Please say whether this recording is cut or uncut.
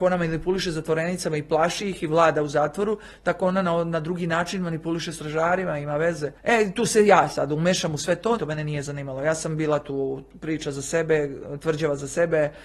cut